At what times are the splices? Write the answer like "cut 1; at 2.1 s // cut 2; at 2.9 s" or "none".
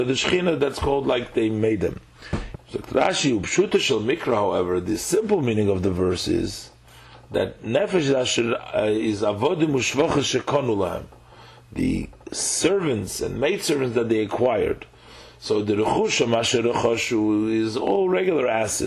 cut 1; at 2.5 s